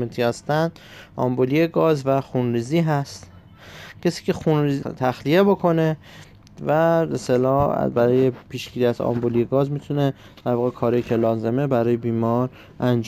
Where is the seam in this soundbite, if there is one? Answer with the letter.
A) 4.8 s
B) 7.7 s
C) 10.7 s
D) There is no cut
A